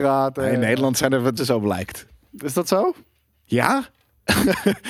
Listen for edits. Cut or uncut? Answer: cut